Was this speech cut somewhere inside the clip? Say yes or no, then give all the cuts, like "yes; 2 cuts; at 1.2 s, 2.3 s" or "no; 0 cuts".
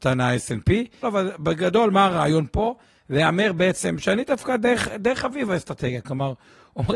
yes; 1 cut; at 1.0 s